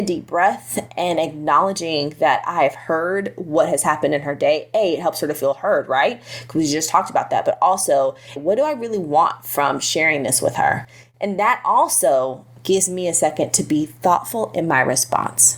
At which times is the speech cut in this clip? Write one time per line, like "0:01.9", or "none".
0:08.4